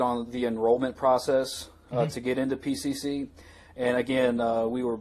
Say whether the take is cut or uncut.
uncut